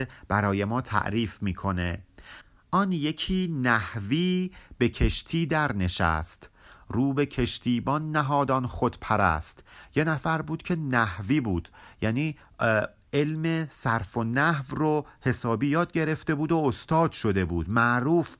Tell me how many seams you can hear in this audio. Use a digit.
0